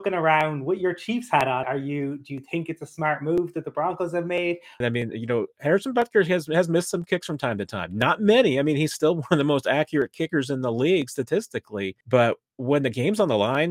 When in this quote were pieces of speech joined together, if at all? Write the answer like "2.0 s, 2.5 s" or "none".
1.6 s, 4.8 s, 12.0 s